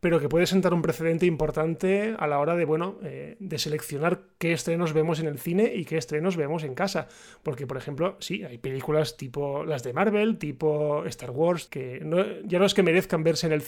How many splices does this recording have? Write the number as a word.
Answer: one